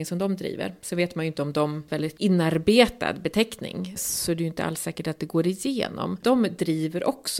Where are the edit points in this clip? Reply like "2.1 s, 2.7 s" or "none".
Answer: 1.9 s, 6.2 s